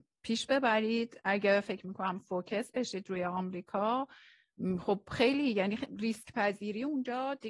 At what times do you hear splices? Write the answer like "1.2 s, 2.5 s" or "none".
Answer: none